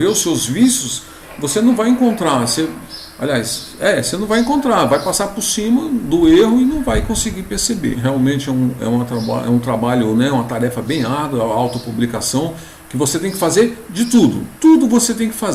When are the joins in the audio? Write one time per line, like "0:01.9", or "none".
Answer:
0:07.9